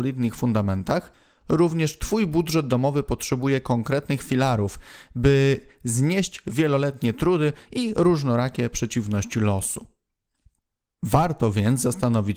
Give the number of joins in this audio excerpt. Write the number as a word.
zero